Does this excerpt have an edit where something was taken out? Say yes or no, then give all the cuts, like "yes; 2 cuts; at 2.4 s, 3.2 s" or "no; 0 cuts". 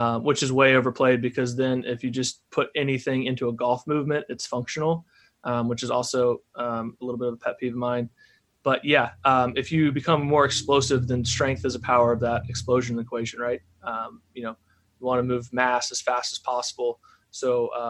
no; 0 cuts